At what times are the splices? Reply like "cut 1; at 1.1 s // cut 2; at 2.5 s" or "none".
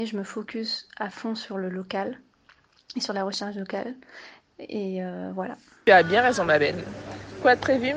none

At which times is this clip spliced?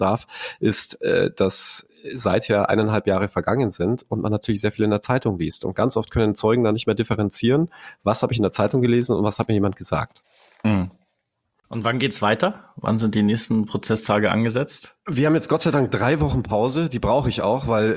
none

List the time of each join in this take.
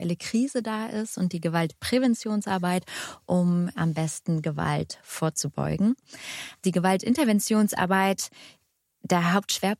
none

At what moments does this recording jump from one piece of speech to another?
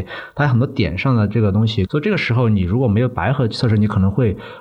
cut 1; at 1.9 s

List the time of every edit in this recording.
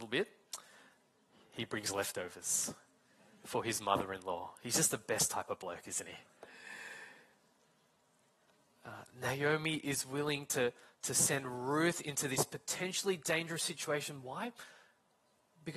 none

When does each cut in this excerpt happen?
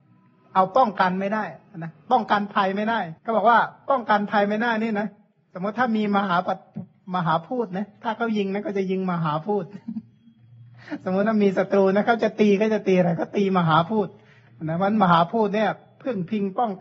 cut 1; at 3.2 s

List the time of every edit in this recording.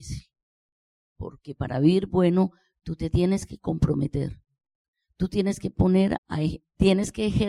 cut 1; at 6.2 s

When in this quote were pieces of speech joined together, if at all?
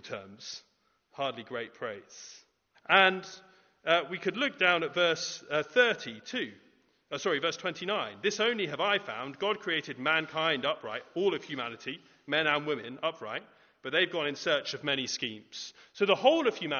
cut 1; at 2.7 s

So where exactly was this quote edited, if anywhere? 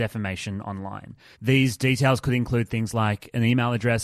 cut 1; at 1.3 s

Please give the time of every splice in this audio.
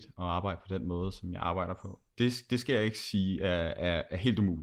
cut 1; at 2.1 s

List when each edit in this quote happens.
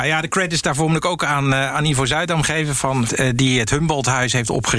cut 1; at 3.1 s

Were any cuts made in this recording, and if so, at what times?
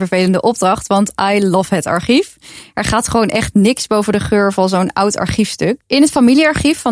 none

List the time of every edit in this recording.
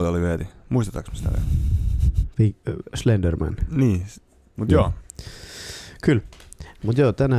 cut 1; at 2.3 s // cut 2; at 4.5 s

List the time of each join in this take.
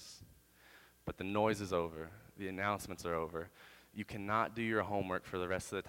none

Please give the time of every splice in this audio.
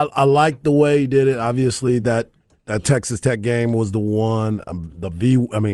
none

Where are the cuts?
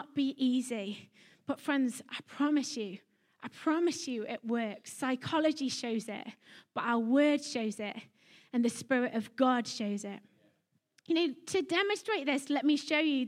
none

